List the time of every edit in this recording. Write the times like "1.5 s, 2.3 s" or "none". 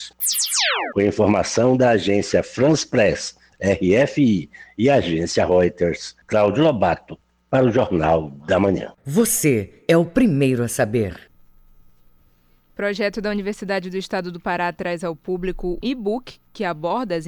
9.0 s, 15.8 s